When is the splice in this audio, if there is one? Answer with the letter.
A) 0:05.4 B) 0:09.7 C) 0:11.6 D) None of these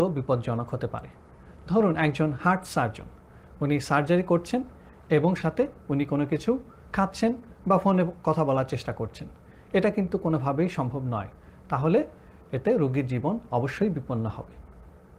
A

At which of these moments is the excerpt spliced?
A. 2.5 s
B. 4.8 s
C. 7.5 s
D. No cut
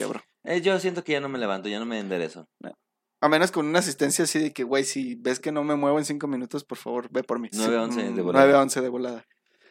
C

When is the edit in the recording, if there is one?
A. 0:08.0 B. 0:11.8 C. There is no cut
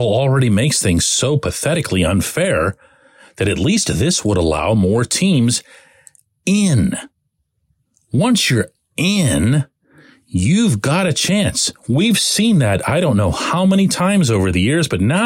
C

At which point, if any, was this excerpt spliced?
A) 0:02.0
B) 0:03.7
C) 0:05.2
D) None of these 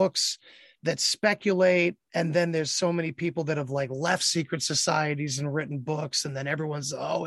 A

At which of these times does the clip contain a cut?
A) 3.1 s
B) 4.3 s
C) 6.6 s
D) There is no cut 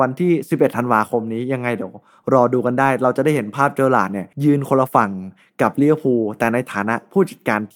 B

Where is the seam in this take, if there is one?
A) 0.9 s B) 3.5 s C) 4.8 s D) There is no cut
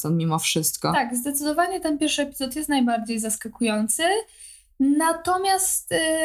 D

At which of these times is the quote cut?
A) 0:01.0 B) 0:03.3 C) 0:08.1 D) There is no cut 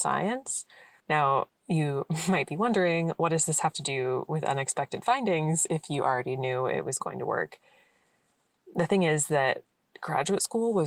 A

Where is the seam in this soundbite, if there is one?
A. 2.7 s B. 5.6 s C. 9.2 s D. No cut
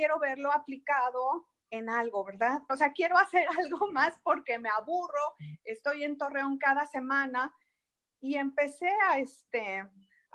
A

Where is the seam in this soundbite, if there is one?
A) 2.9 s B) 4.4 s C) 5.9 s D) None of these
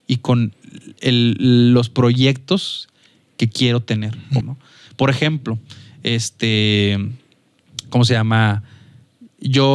B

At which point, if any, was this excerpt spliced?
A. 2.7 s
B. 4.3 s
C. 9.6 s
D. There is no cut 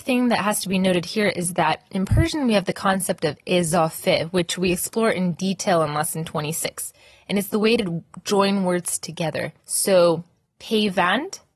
C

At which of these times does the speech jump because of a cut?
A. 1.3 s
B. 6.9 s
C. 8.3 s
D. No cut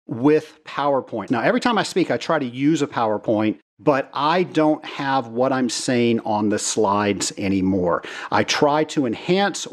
A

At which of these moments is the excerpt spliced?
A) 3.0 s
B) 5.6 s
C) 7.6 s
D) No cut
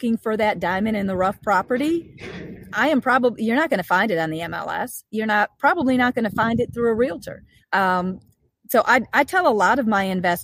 C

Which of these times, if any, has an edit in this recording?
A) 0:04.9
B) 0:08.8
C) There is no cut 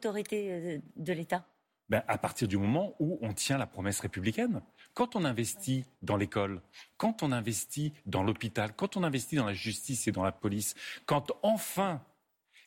C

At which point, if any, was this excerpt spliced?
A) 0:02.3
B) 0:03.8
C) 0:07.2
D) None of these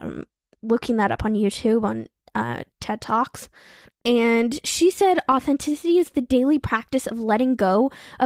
B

